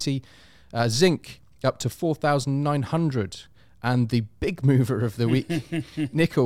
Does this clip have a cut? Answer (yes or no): no